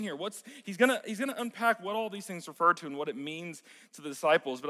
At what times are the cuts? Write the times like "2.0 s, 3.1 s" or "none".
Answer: none